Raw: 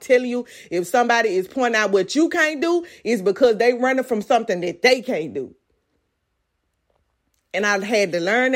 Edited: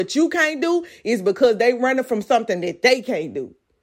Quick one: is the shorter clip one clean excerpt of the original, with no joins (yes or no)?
yes